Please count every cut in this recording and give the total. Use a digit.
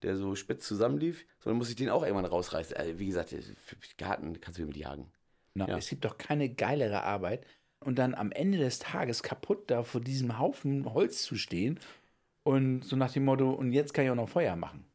3